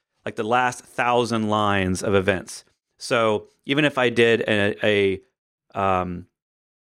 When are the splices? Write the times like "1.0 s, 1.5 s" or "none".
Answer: none